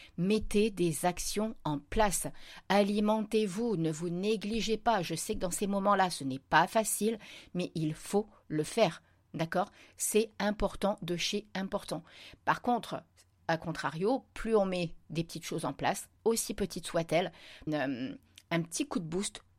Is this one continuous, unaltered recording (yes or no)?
no